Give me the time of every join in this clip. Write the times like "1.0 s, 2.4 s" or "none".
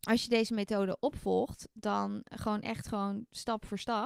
2.3 s